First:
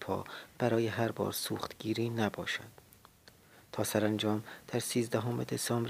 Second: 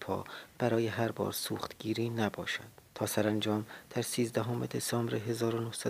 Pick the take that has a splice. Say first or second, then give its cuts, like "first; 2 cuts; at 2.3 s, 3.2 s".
second; 1 cut; at 2.9 s